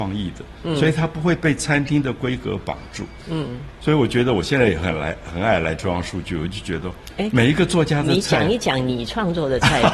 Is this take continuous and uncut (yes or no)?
yes